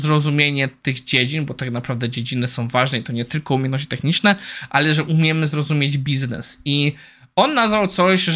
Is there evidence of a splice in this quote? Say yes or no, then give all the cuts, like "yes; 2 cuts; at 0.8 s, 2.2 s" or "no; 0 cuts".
no; 0 cuts